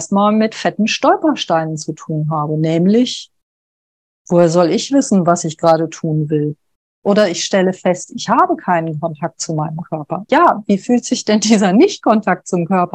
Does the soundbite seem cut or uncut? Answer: cut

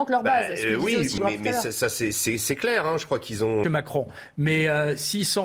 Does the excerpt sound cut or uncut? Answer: cut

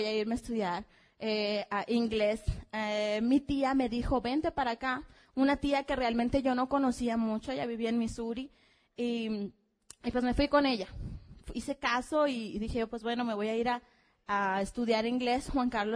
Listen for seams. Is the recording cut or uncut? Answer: uncut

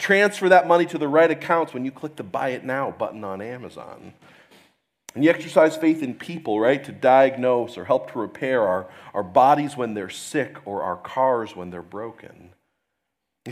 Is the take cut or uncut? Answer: uncut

